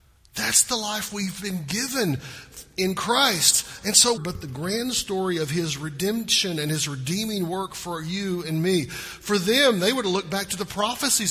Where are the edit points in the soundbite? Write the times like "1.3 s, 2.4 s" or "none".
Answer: 4.2 s